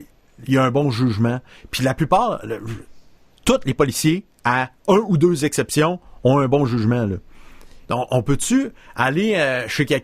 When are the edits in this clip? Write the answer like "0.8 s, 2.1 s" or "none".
7.9 s